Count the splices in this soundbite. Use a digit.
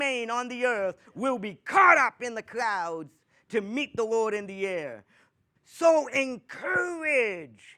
1